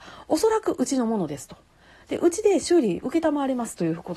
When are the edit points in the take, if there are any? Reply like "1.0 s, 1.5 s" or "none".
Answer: none